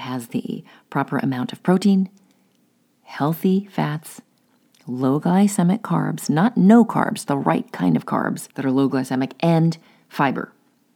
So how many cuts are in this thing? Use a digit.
2